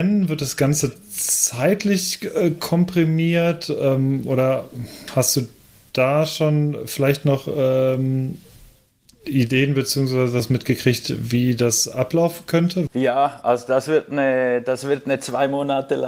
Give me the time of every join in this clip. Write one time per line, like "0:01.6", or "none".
0:12.9